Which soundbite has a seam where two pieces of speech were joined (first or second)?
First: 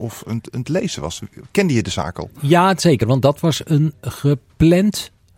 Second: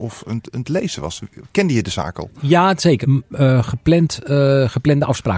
second